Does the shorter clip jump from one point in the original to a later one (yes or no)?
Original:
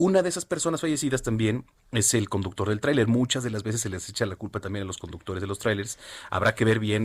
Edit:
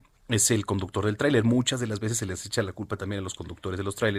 no